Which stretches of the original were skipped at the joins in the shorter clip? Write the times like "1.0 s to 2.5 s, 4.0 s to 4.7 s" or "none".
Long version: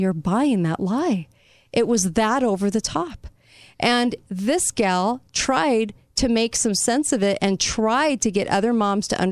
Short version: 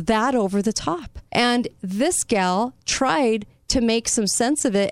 3.4 s to 3.7 s